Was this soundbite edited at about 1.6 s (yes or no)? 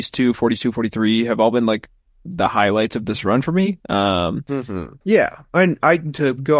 no